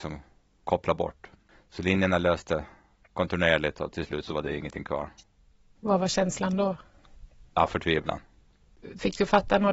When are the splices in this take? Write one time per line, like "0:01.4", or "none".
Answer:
none